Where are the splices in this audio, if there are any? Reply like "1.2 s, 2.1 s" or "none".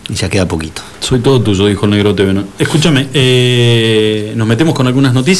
none